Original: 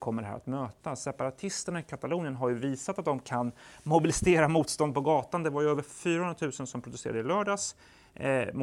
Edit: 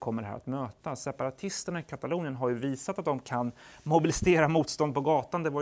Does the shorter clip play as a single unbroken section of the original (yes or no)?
yes